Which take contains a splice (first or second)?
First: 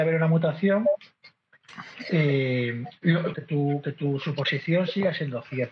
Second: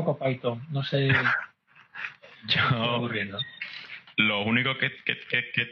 first